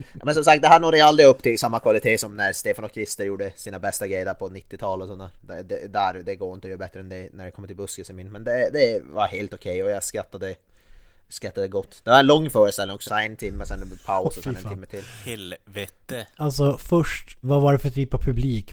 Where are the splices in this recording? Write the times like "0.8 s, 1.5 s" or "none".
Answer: 13.1 s, 16.4 s, 17.4 s